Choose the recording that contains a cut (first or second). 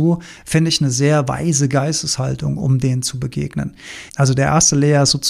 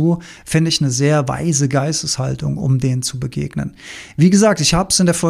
first